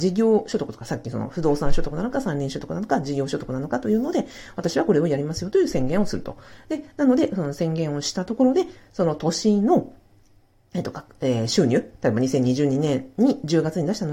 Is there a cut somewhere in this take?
no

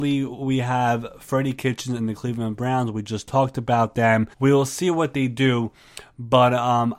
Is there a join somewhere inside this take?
yes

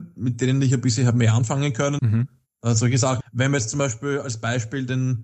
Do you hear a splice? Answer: yes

